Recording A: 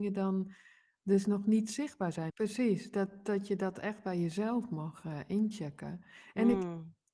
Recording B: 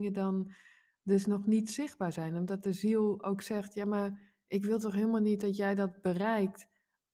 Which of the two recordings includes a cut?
A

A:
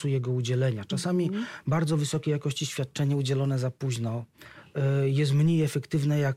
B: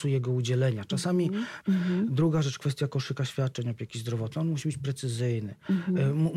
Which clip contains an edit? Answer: B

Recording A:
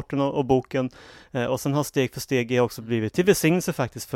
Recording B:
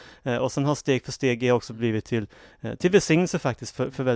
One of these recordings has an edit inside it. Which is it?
A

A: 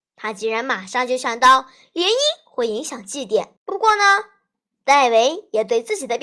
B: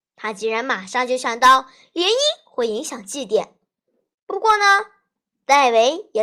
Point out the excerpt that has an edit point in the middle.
A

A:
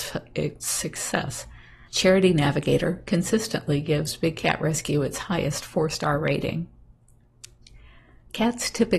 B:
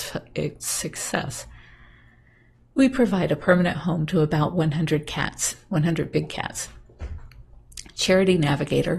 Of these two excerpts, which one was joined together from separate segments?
A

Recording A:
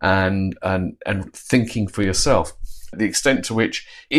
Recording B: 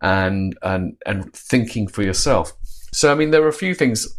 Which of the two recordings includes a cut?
A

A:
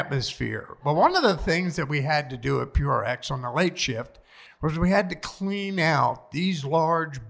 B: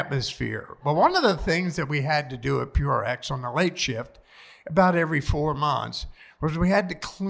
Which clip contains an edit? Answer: A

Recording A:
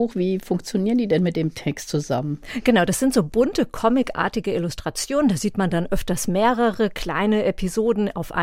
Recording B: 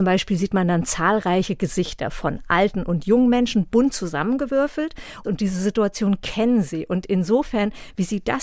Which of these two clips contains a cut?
B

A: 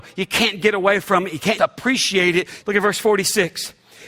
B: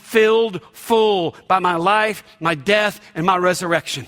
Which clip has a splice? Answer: A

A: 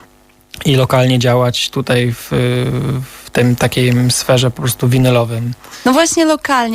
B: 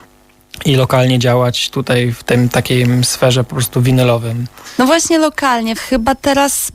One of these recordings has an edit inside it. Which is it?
B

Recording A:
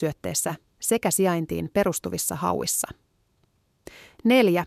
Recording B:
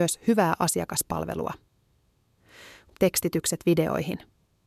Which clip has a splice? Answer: B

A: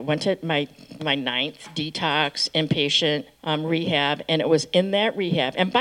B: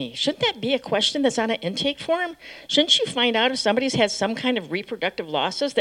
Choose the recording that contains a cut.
A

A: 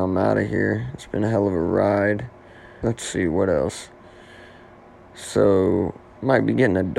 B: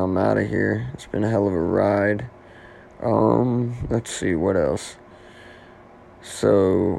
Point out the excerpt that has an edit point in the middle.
A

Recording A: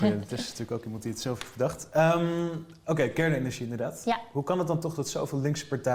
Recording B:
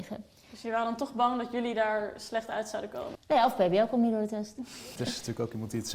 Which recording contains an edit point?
B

